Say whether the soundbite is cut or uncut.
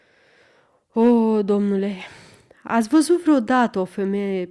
uncut